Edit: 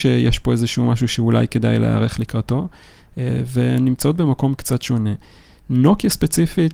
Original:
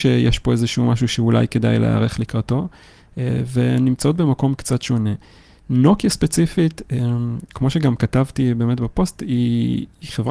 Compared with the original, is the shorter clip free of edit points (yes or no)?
yes